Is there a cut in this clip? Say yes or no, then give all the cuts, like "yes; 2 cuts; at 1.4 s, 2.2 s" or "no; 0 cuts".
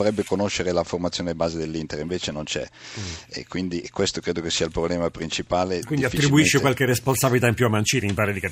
no; 0 cuts